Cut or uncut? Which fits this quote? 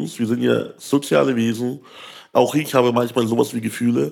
uncut